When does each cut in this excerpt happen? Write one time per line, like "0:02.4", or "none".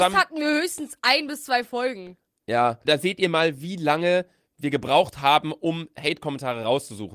0:02.8